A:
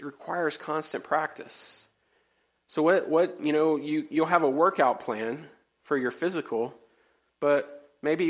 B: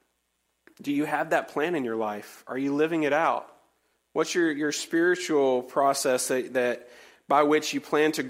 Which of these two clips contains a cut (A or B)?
B